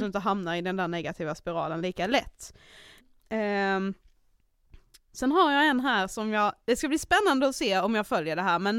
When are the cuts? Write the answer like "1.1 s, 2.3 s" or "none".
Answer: 3.0 s

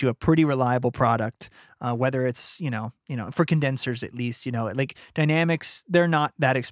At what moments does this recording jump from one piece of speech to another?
none

